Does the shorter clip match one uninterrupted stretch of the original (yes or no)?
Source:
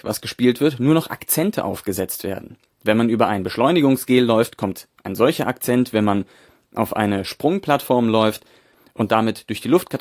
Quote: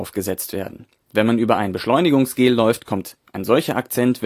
yes